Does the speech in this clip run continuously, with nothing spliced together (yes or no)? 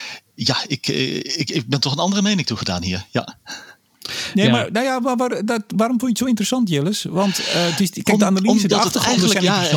yes